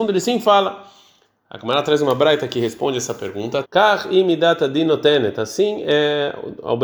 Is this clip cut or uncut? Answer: cut